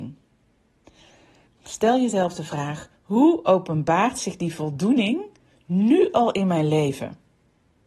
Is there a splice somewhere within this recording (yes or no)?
yes